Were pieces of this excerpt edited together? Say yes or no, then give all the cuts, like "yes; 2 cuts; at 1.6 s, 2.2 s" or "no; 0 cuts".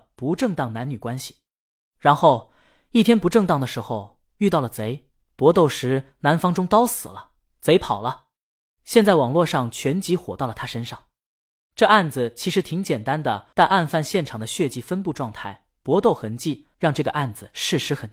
yes; 3 cuts; at 8.7 s, 13.5 s, 16.7 s